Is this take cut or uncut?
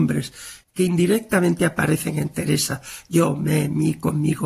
uncut